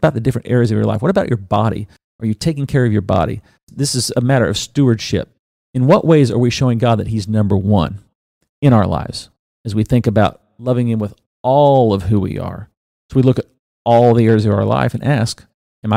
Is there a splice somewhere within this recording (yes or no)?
no